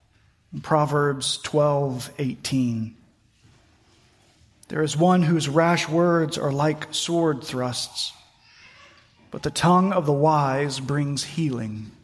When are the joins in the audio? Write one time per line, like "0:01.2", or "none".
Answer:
none